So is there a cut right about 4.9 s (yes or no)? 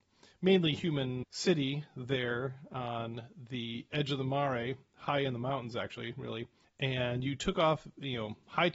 no